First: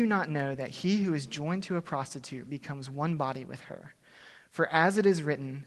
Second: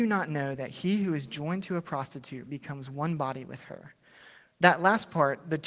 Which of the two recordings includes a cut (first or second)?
second